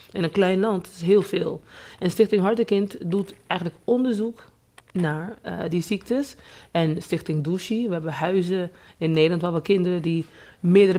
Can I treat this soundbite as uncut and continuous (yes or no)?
yes